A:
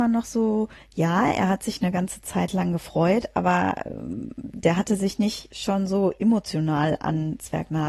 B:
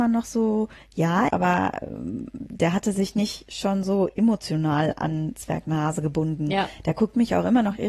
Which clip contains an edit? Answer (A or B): B